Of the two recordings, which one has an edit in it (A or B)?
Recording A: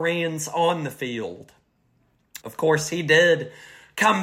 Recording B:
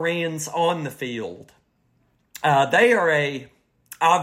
A